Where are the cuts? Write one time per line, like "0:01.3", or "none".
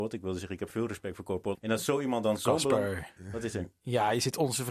0:01.5